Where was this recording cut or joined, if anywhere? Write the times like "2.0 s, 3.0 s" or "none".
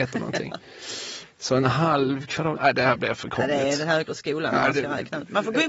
2.6 s